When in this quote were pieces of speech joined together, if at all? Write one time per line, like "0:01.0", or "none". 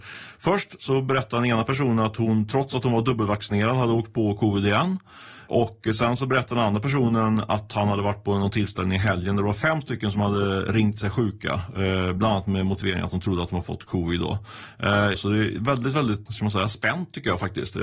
0:15.1
0:16.3